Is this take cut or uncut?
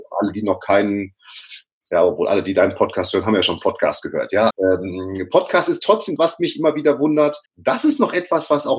cut